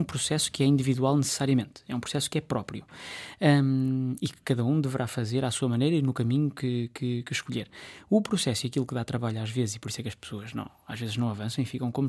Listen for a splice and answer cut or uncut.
uncut